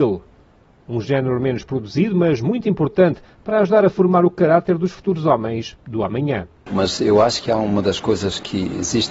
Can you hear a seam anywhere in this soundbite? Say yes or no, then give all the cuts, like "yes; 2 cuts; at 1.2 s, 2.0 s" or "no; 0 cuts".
yes; 1 cut; at 6.7 s